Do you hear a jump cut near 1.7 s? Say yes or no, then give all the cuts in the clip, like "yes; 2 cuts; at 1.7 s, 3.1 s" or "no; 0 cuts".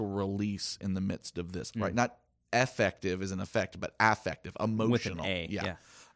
yes; 1 cut; at 1.7 s